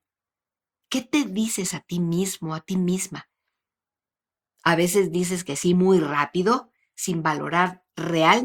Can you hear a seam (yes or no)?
no